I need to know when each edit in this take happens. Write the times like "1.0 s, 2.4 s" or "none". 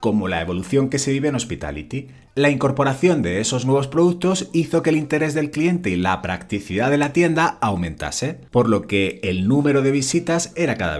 2.3 s, 8.5 s